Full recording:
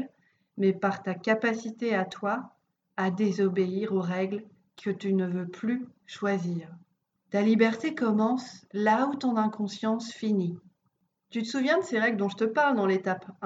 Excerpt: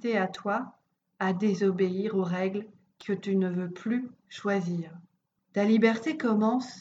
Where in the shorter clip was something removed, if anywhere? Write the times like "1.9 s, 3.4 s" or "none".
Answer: none